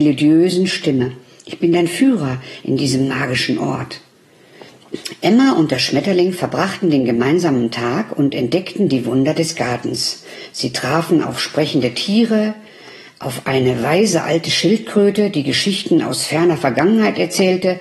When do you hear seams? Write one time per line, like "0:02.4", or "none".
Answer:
none